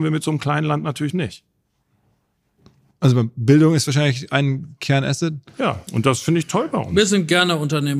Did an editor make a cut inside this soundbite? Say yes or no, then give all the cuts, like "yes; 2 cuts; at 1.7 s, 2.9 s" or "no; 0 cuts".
no; 0 cuts